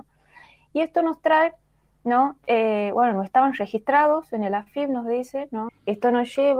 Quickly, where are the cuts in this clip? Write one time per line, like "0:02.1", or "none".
0:05.7